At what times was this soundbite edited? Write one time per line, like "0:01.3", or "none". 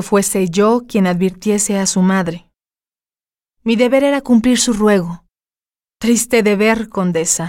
none